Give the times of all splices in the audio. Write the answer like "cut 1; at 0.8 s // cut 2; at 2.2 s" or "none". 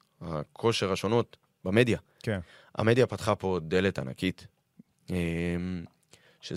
none